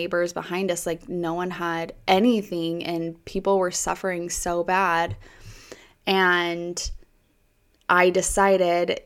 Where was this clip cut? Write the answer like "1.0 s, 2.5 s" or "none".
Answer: none